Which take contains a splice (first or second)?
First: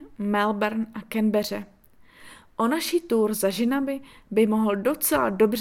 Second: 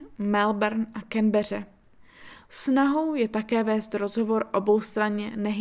second